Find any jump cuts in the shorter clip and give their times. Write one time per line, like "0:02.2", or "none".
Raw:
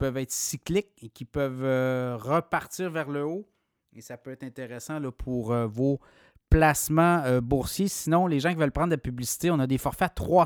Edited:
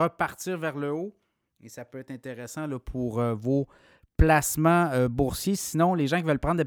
none